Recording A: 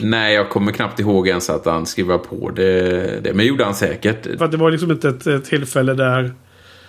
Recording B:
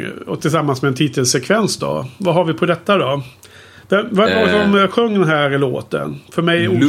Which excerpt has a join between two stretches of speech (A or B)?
A